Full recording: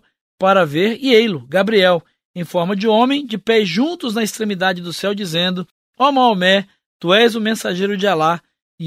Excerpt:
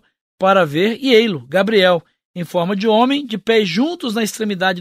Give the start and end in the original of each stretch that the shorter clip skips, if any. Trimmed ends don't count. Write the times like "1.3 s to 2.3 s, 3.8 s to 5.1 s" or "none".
none